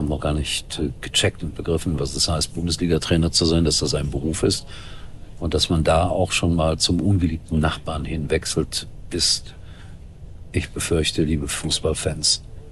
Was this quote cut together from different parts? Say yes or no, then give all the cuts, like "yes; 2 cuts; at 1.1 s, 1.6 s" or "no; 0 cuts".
no; 0 cuts